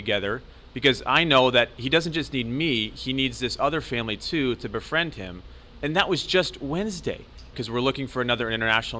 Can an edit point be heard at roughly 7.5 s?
yes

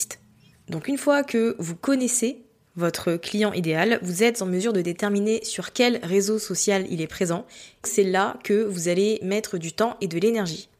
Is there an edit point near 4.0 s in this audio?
no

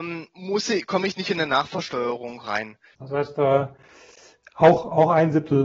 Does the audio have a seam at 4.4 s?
no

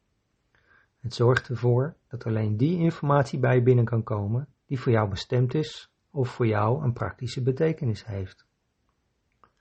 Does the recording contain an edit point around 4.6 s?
yes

